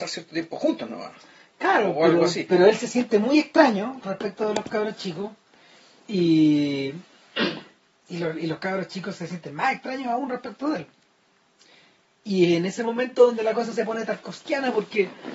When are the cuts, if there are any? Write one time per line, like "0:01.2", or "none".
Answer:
none